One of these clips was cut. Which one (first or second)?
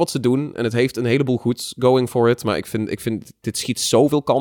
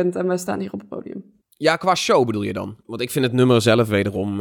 second